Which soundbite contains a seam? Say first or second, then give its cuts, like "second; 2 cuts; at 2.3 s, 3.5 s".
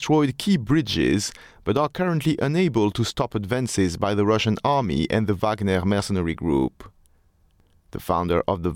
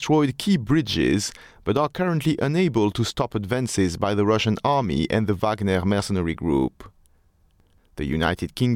second; 1 cut; at 7.8 s